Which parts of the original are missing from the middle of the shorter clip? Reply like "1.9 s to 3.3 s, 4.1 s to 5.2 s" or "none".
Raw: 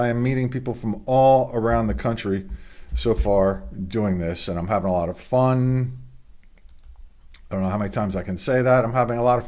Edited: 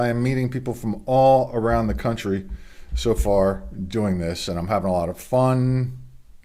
none